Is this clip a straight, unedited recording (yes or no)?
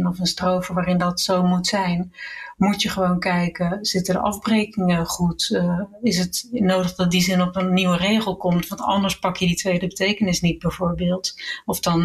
yes